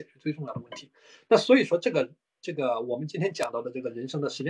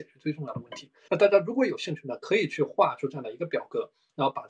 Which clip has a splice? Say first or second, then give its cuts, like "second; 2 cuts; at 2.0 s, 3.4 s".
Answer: second; 1 cut; at 1.1 s